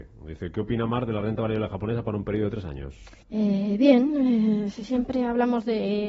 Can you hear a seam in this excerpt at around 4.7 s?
no; 1 cut; at 3.2 s

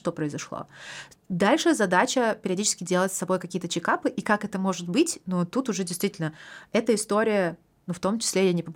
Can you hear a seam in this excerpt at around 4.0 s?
no; 1 cut; at 1.1 s

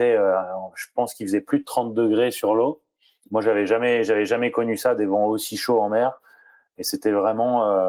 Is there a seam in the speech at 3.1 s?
no; 0 cuts

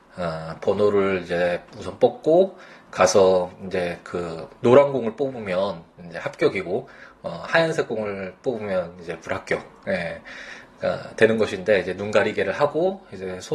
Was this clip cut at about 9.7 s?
no; 0 cuts

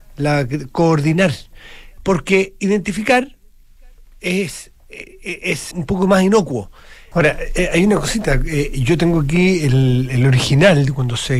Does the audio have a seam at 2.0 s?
yes; 3 cuts; at 2.0 s, 5.7 s, 7.1 s

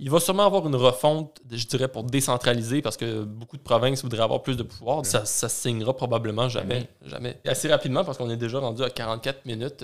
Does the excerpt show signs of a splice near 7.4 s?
yes; 2 cuts; at 5.0 s, 7.4 s

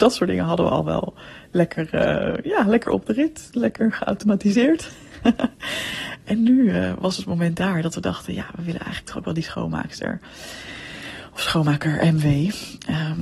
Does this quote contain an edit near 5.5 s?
no; 0 cuts

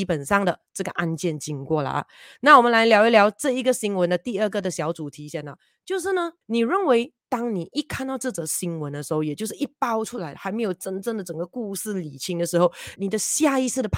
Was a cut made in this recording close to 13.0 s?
yes; 2 cuts; at 6.4 s, 13.0 s

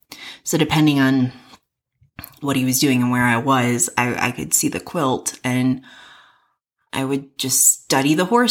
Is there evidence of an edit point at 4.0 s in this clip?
no; 0 cuts

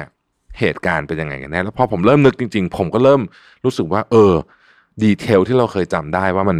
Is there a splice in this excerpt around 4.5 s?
no; 0 cuts

